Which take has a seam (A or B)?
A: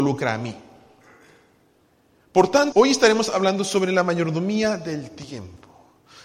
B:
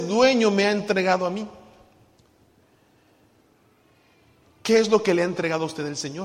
A